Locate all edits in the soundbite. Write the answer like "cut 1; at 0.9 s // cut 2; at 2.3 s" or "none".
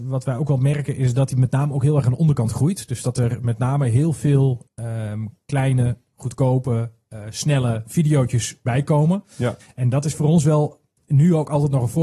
cut 1; at 4.7 s // cut 2; at 9.6 s